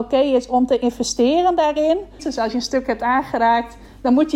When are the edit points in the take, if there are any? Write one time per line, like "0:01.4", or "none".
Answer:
0:02.2